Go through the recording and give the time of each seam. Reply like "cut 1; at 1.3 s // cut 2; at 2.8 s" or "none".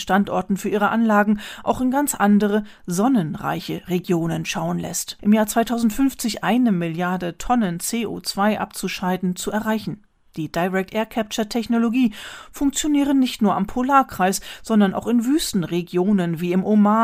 cut 1; at 5.2 s